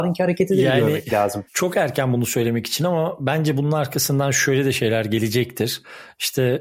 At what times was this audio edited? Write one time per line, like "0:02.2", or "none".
0:01.5

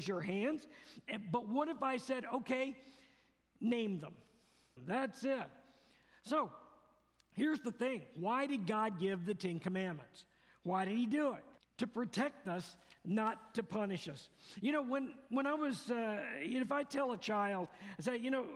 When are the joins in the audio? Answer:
0:04.8
0:11.6

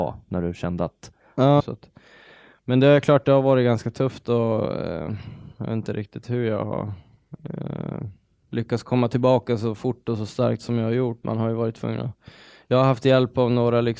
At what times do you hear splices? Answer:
0:01.6
0:11.2

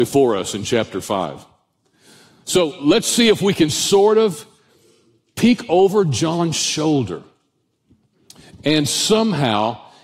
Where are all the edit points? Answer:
none

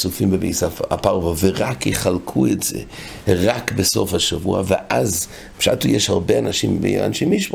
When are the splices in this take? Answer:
none

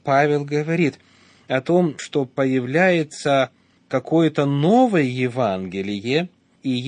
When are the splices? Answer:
none

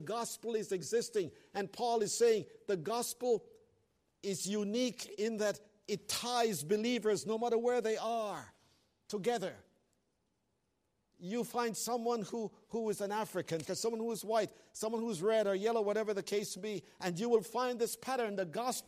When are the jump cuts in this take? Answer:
0:13.6

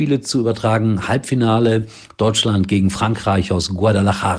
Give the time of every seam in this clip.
none

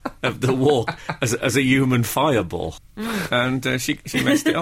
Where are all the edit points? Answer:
0:02.8

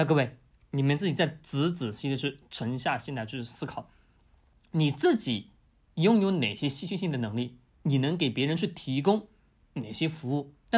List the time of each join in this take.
none

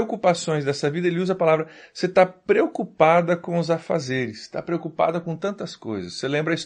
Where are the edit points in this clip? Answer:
none

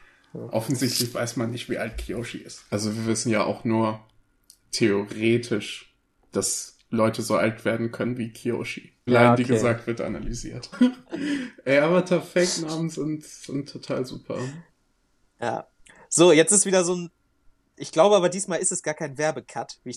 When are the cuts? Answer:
0:02.7
0:09.1
0:10.7

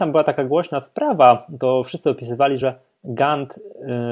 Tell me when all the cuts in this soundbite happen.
none

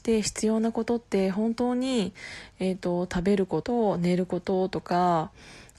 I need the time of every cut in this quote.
0:03.6

